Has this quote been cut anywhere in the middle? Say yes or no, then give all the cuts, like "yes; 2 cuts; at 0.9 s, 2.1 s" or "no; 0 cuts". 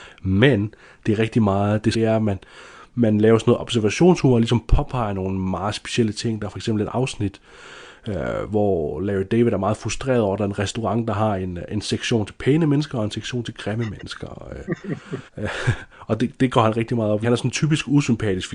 yes; 3 cuts; at 1.9 s, 15.3 s, 17.2 s